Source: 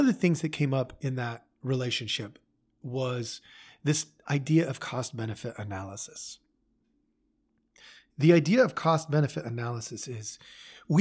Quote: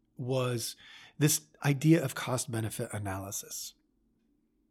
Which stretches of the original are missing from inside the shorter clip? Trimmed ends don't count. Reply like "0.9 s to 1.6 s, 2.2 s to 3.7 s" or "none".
none